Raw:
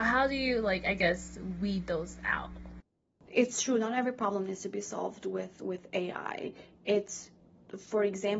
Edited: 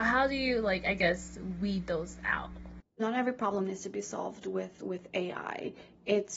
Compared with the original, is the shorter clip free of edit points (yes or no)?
no